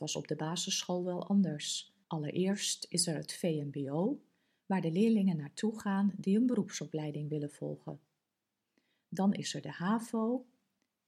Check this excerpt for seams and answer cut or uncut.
cut